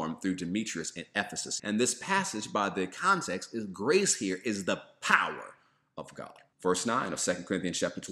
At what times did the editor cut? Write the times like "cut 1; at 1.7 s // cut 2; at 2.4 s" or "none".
cut 1; at 1.6 s // cut 2; at 6.5 s